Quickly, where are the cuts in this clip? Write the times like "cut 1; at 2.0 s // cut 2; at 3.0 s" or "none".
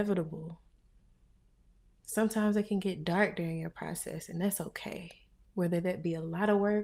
cut 1; at 5.4 s